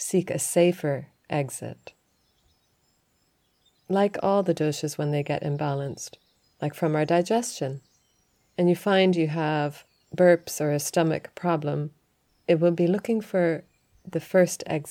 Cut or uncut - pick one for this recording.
uncut